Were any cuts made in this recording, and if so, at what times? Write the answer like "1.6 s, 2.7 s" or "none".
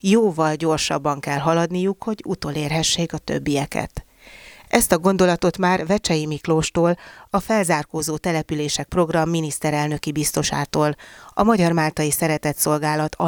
none